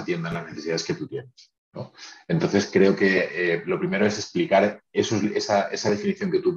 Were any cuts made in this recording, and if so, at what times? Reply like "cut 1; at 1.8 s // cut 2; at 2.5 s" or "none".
none